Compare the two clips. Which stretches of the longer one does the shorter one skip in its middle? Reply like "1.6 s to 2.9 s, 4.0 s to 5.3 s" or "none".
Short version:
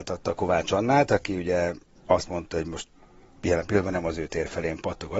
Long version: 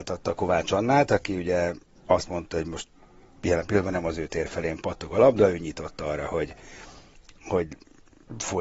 none

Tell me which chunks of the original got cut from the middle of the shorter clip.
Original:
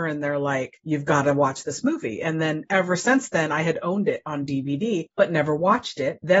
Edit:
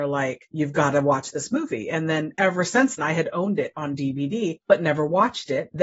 3.3 s to 3.5 s

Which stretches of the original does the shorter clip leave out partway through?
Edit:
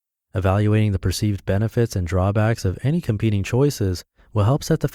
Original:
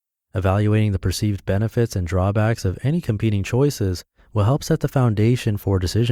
none

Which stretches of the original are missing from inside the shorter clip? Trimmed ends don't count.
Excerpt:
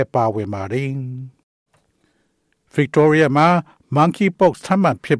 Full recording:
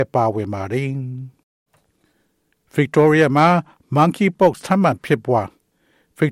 none

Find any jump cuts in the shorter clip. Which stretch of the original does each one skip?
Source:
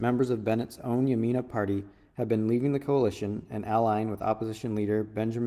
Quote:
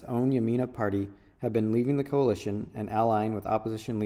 none

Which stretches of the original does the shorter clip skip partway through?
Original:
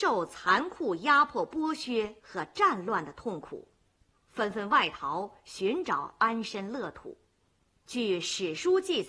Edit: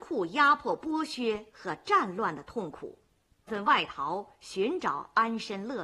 4.2 s to 4.5 s

